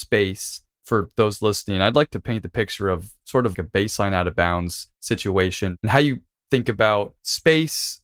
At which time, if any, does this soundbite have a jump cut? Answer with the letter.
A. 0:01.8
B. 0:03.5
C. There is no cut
B